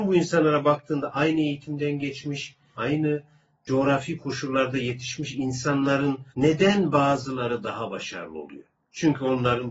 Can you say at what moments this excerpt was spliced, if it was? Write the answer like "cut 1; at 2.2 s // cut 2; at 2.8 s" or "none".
cut 1; at 2.8 s // cut 2; at 6.3 s